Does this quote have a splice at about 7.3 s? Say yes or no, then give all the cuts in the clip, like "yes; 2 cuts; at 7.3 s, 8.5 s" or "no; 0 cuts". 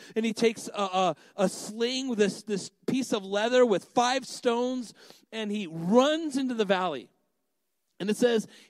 no; 0 cuts